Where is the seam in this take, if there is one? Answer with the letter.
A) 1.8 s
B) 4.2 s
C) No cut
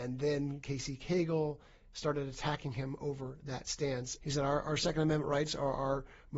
B